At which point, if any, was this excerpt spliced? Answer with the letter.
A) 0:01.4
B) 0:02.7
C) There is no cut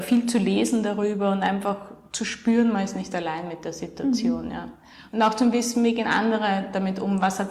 C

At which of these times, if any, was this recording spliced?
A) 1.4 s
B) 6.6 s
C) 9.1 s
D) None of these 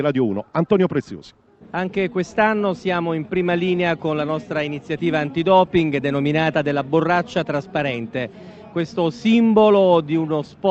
D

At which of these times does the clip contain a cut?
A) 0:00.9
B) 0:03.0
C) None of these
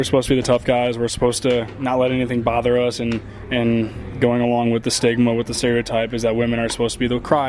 C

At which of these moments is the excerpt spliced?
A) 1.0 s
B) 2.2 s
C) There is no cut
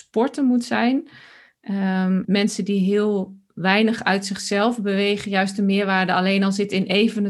B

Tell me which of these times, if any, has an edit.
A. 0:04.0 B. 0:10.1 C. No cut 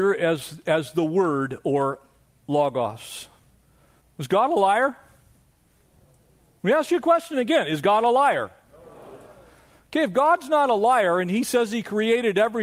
A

